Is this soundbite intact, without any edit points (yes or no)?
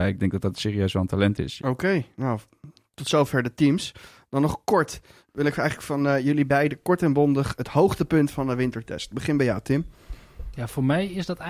no